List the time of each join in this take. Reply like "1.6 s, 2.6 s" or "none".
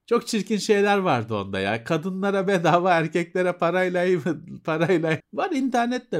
5.2 s